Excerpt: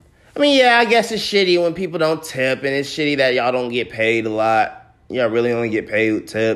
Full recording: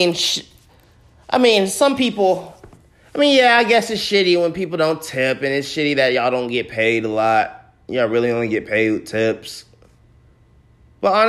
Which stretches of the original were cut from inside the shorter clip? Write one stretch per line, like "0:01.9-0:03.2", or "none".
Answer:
none